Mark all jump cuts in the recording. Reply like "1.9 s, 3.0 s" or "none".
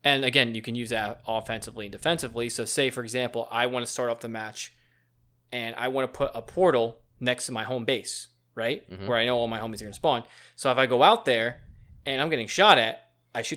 none